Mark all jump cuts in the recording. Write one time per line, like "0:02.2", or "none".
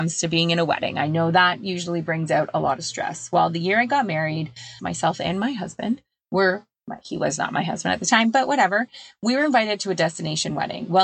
0:04.8